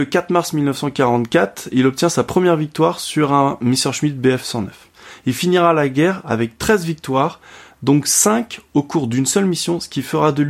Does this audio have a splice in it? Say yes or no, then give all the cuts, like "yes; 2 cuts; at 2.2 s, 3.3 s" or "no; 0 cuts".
no; 0 cuts